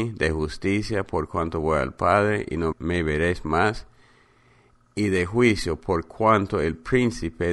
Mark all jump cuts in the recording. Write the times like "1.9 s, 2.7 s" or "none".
2.7 s